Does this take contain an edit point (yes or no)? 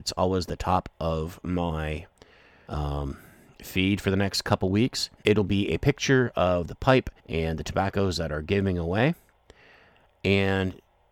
yes